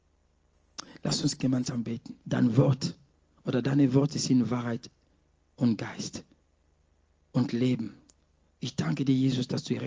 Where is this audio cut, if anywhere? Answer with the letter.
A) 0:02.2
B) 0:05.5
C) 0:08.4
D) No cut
A